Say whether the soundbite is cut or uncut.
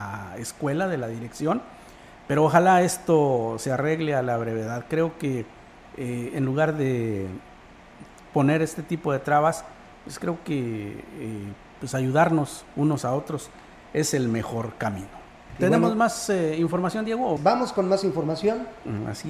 cut